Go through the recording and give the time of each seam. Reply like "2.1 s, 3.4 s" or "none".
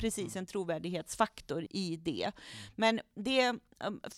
1.7 s